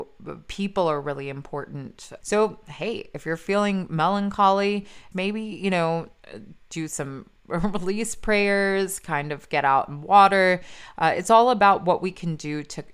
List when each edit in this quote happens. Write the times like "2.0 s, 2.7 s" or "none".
2.2 s, 5.1 s